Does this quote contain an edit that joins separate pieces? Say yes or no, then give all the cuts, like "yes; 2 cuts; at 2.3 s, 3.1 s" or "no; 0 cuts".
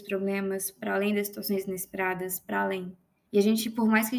yes; 1 cut; at 3.2 s